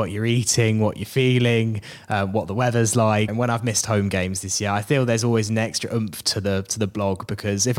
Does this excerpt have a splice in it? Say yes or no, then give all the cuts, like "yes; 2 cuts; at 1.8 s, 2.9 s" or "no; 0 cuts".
yes; 1 cut; at 3.3 s